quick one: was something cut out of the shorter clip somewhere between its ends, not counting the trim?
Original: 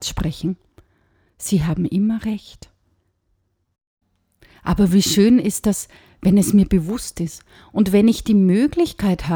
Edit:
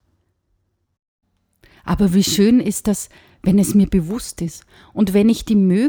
no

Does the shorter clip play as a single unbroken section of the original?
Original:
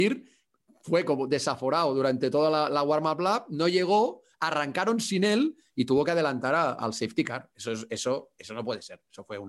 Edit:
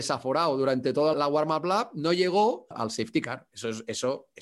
no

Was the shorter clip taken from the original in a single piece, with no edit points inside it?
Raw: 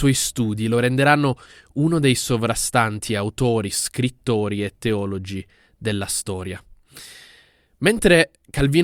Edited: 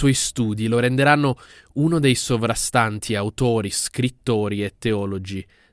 yes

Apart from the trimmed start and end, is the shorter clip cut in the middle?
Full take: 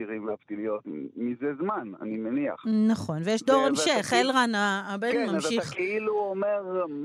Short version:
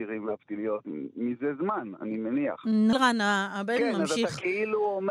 yes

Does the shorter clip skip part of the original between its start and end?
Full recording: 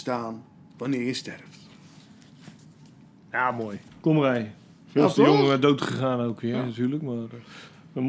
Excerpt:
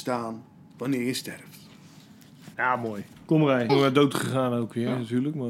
yes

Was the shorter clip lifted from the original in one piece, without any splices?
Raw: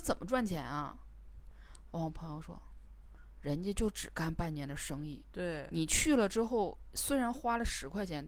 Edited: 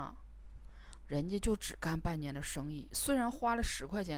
no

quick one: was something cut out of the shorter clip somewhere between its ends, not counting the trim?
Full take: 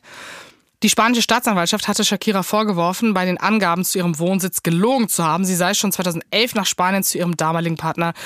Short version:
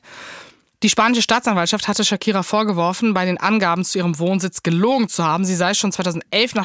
no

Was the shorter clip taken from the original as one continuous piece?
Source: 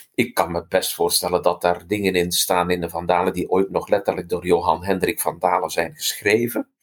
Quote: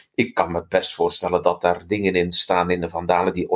yes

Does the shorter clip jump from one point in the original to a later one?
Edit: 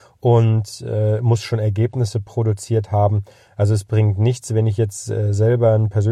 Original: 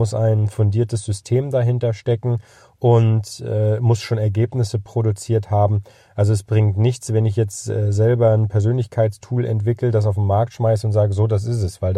no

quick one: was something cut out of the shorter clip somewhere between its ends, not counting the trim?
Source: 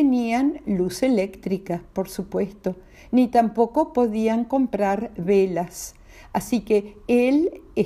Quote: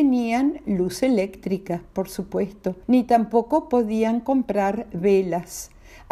yes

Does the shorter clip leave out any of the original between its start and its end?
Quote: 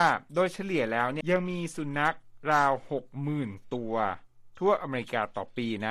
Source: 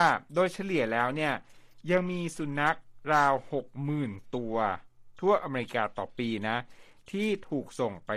yes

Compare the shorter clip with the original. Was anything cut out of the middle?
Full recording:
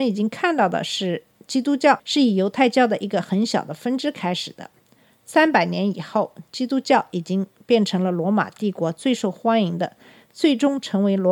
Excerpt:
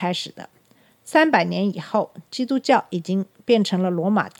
no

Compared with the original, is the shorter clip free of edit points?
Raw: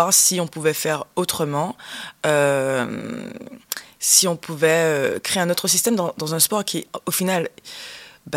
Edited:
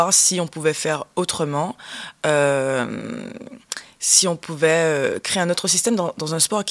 yes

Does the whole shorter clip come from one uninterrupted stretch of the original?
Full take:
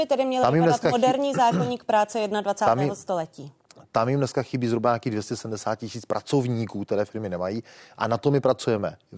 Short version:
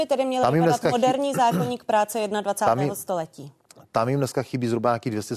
yes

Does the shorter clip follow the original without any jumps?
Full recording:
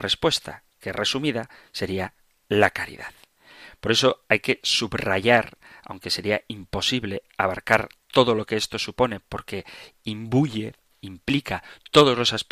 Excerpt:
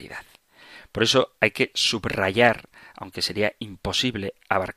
yes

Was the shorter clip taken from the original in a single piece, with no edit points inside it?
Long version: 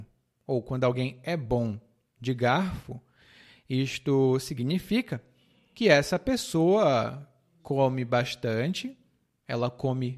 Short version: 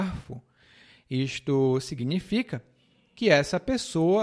yes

